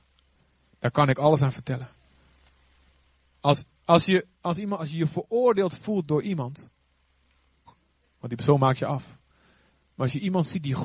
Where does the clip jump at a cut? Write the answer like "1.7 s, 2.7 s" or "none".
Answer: 4.8 s, 7.7 s